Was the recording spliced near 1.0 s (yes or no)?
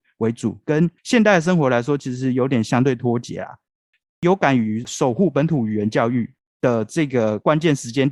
yes